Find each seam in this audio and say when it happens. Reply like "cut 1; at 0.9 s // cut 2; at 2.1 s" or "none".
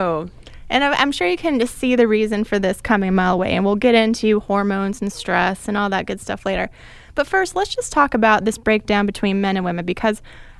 none